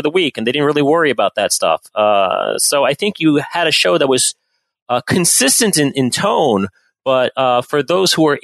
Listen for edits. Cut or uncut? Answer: uncut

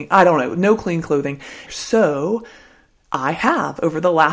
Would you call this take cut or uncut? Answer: cut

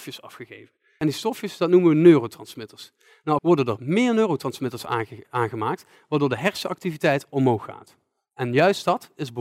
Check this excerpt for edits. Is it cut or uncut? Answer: cut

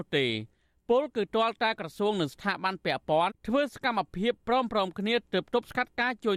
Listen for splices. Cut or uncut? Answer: cut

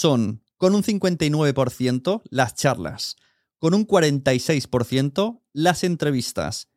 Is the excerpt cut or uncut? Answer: uncut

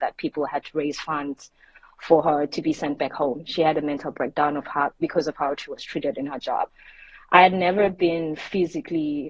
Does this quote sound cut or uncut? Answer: uncut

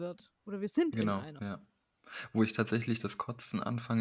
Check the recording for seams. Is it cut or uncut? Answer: uncut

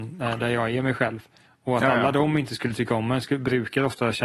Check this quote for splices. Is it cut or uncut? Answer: cut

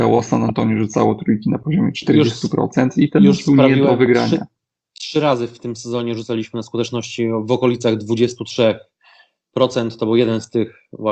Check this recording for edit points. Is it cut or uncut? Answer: uncut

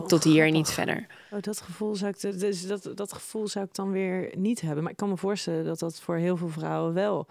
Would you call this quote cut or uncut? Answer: uncut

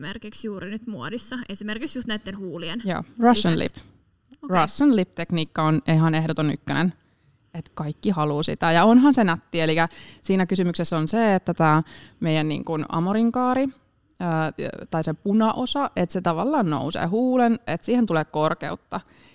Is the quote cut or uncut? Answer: cut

